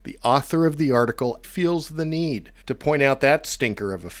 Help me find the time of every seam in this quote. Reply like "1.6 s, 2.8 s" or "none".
1.4 s, 2.6 s

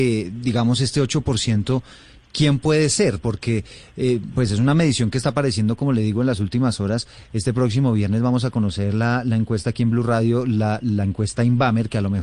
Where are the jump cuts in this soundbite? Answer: none

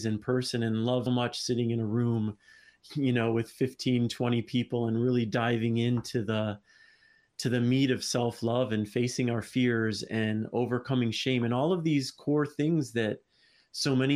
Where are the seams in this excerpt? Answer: 1.1 s

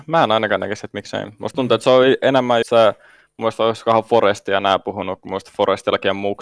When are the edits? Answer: 2.6 s

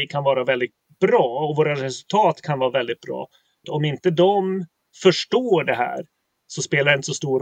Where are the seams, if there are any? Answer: 3.6 s

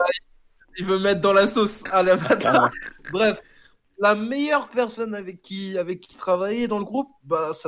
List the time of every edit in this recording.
2.7 s

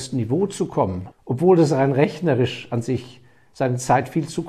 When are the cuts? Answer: 1.1 s

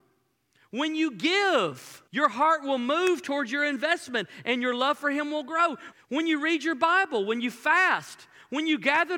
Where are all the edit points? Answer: 2.1 s, 5.9 s

